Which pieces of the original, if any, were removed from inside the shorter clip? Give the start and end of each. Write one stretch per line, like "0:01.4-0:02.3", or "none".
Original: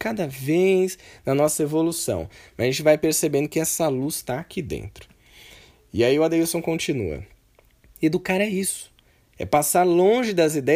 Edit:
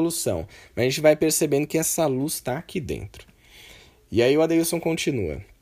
none